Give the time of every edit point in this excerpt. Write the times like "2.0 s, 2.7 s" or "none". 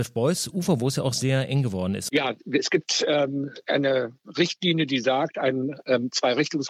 2.1 s